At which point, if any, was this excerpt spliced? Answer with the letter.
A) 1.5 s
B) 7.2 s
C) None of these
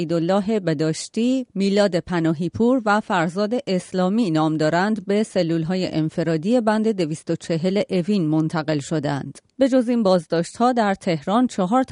A